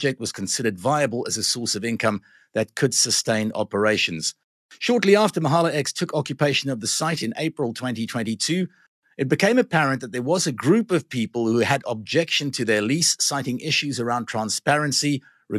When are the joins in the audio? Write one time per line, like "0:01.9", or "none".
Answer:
none